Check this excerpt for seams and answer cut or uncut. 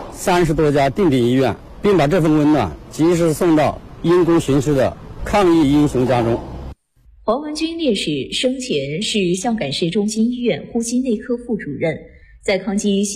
uncut